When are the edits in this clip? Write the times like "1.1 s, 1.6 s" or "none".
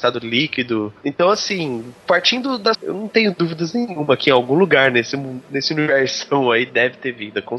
2.7 s